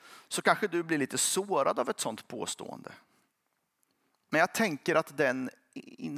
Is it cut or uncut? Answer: uncut